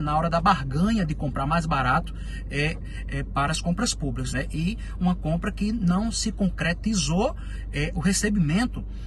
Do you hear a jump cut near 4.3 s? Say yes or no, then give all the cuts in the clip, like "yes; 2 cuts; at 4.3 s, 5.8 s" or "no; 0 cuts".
yes; 2 cuts; at 4.3 s, 7.9 s